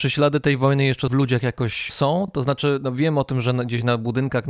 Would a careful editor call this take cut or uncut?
uncut